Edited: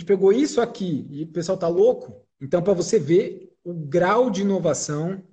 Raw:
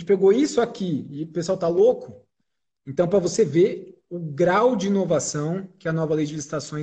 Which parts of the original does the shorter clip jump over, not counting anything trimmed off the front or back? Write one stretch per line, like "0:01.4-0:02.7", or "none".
0:02.3-0:02.8